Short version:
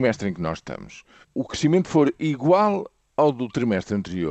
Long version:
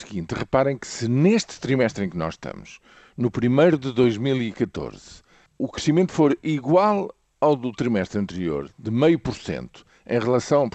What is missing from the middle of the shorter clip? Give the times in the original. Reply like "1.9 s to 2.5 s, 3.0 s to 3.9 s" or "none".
3.0 s to 5.5 s